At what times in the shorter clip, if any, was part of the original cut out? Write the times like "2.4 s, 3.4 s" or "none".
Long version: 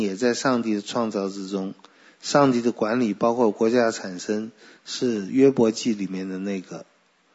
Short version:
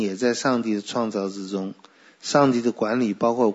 none